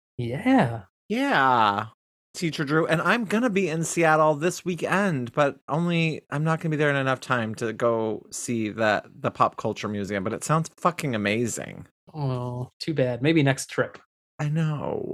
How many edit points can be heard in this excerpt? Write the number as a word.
one